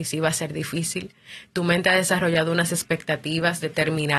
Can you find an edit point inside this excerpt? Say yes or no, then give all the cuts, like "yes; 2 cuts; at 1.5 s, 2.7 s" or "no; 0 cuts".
no; 0 cuts